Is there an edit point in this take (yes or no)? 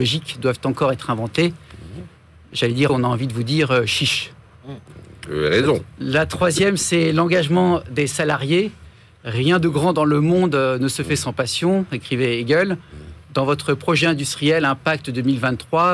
yes